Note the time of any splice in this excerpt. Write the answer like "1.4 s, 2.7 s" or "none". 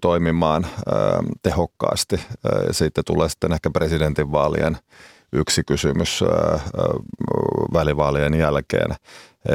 none